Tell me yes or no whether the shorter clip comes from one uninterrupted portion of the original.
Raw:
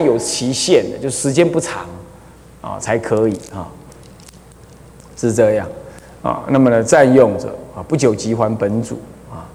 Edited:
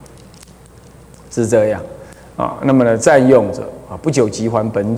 yes